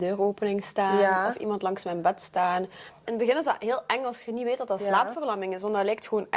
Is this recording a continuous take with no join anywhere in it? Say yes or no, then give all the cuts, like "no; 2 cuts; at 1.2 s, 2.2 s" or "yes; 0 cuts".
no; 1 cut; at 3.1 s